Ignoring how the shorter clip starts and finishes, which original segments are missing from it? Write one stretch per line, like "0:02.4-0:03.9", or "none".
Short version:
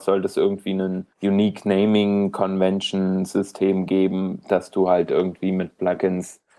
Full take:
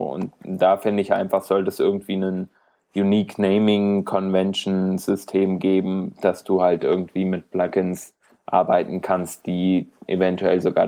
0:02.5-0:02.8